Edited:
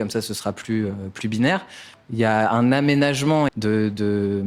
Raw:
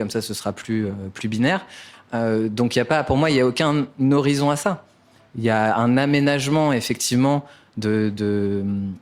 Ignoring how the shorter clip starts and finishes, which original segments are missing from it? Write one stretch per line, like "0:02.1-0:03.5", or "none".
0:01.9-0:05.2
0:06.7-0:07.7